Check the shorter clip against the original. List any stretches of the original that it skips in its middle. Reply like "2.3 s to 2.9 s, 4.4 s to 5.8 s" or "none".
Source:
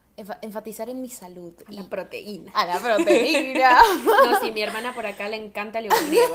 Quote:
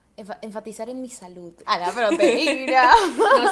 1.6 s to 2.5 s